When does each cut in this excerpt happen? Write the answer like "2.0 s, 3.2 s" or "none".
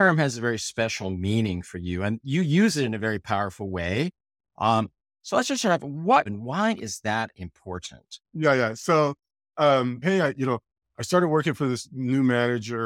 6.3 s, 8.3 s, 10.0 s